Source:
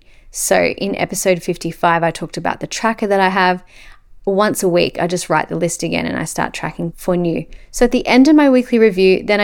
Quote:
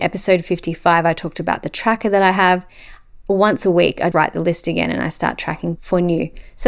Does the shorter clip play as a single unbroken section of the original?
no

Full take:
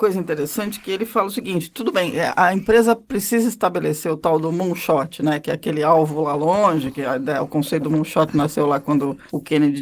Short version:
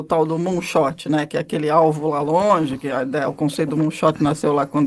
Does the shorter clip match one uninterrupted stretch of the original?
yes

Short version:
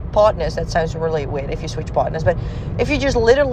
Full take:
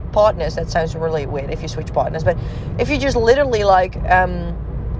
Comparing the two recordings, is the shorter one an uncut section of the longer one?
yes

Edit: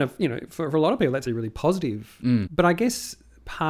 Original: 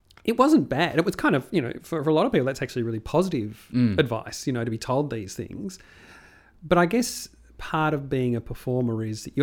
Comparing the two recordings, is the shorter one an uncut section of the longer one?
no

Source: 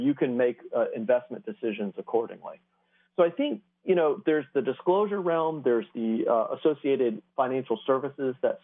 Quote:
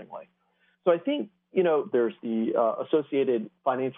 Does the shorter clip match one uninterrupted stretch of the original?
no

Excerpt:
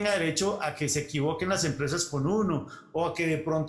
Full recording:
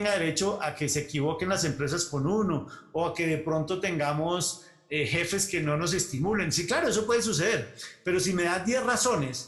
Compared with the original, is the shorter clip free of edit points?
yes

